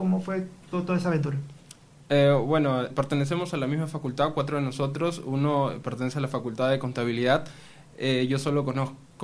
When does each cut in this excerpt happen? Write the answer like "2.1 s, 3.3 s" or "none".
2.9 s